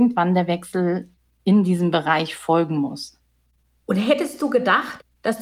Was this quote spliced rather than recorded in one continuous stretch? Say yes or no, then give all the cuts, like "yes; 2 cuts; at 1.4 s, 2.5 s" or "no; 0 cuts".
no; 0 cuts